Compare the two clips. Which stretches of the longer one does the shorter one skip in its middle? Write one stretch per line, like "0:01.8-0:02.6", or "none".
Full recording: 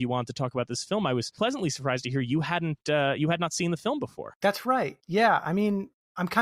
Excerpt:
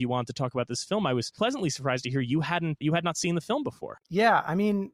0:02.8-0:03.2
0:04.4-0:05.0